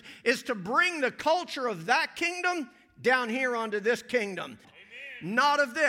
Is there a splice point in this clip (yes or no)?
yes